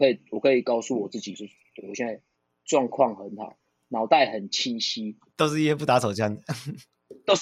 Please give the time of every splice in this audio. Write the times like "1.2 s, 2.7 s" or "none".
none